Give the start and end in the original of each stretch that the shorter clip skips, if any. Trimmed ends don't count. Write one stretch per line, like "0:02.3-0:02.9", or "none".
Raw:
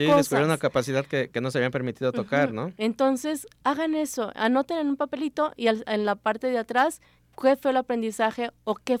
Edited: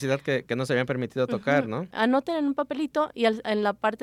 0:02.8-0:04.3